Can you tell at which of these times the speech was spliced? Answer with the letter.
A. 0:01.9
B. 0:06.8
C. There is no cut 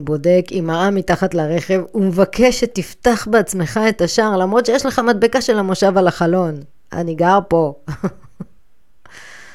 C